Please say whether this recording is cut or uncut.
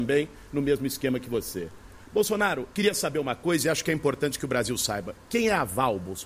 cut